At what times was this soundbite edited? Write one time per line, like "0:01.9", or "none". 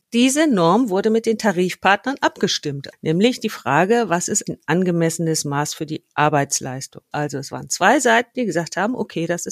0:02.9
0:04.5
0:07.1